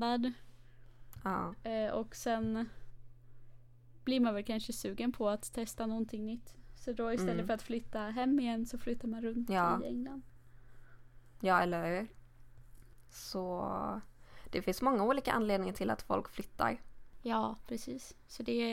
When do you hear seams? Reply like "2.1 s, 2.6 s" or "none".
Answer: none

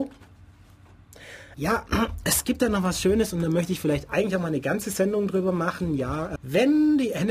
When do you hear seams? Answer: 1.5 s, 6.4 s

